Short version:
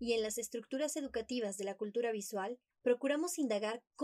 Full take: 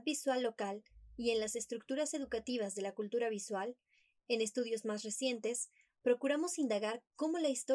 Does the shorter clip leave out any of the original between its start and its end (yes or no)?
yes